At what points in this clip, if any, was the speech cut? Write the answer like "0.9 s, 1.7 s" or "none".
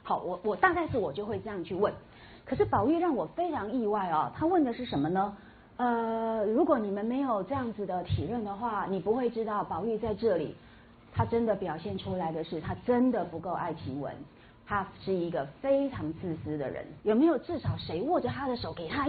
17.0 s